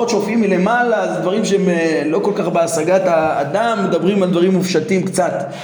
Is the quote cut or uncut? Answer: uncut